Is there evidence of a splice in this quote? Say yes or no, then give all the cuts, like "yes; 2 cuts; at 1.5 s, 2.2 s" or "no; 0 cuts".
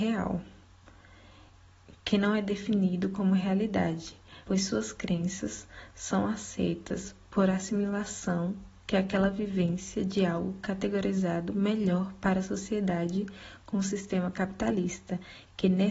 yes; 1 cut; at 4.4 s